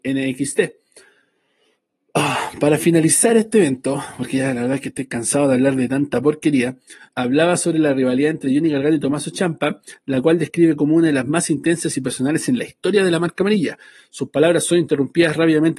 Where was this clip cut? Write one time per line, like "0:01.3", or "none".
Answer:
0:07.1